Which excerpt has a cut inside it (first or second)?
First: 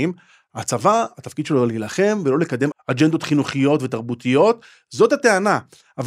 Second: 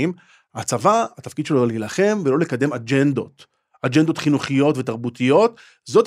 first